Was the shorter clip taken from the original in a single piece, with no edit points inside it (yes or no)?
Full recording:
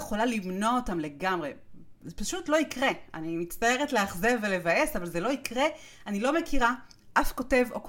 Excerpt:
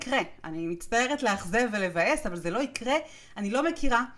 yes